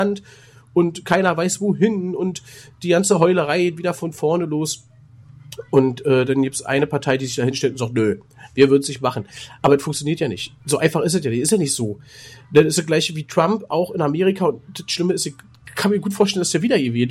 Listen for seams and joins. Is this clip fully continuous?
no; 1 cut; at 9.6 s

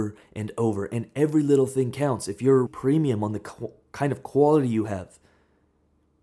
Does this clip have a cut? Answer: yes; 1 cut; at 2.7 s

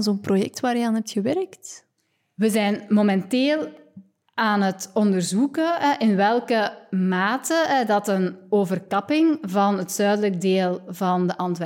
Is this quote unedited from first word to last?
yes; 0 cuts

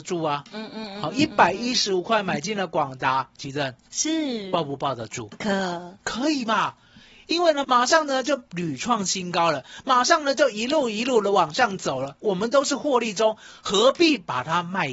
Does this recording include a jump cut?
yes; 1 cut; at 7.6 s

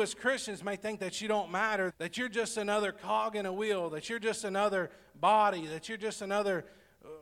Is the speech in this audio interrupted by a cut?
yes; 1 cut; at 1.9 s

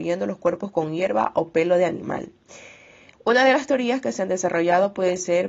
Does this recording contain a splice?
yes; 1 cut; at 3.1 s

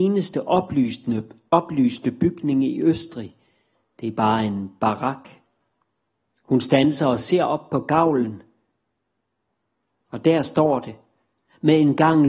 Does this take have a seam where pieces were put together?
no; 0 cuts

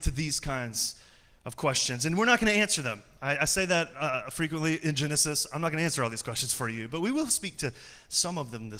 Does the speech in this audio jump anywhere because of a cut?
no; 0 cuts

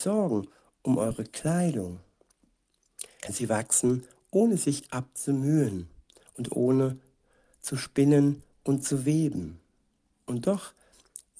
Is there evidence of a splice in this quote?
yes; 1 cut; at 3.2 s

